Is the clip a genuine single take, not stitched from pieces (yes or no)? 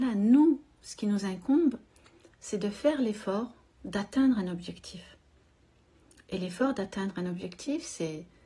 yes